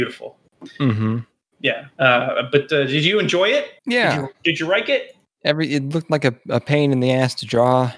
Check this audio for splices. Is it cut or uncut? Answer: cut